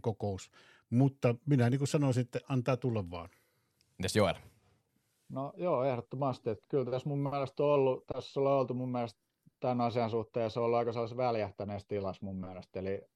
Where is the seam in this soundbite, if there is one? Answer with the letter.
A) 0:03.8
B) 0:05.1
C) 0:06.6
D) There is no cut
C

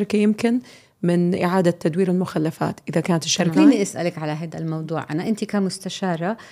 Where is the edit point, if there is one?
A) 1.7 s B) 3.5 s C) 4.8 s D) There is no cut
B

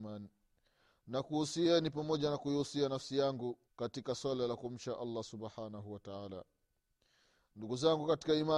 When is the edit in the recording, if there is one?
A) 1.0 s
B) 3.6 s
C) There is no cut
B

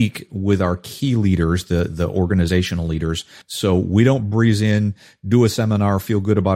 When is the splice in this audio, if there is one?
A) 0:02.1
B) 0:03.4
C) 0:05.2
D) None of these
B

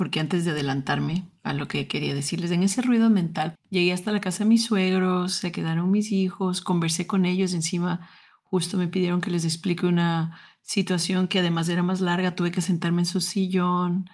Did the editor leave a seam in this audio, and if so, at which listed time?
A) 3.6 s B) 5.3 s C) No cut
A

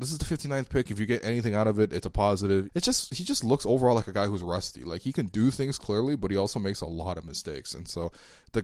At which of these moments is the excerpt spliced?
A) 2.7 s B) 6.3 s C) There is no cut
A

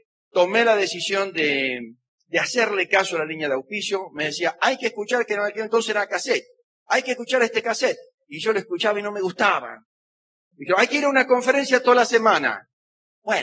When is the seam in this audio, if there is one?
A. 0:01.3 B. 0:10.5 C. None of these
B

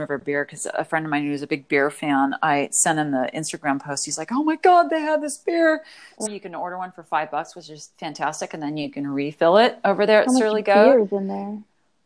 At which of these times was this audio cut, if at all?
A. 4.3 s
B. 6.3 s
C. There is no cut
B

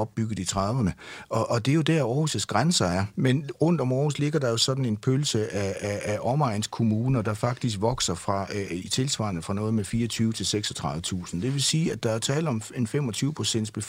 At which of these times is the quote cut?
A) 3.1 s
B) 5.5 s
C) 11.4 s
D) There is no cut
A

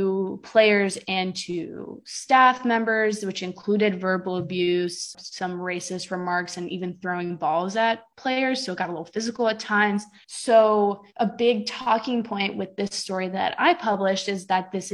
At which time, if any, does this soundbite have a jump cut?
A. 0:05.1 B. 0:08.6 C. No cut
A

